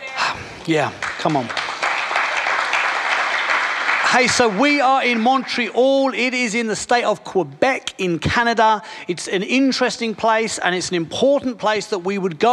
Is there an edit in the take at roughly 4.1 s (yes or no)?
no